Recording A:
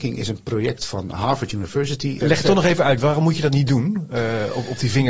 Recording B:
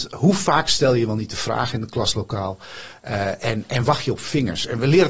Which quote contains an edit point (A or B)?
A